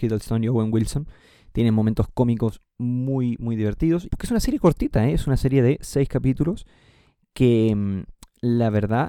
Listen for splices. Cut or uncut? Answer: cut